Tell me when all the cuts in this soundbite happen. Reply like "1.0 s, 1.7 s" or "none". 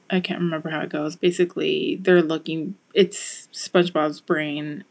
1.2 s, 2.8 s